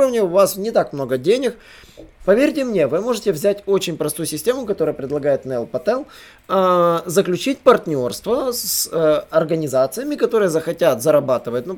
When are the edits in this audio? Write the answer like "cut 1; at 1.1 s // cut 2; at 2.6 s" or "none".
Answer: cut 1; at 2.2 s